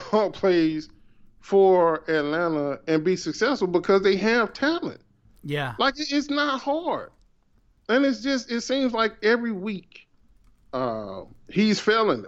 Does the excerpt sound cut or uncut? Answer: cut